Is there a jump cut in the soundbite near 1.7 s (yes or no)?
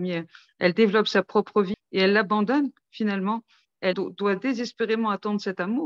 yes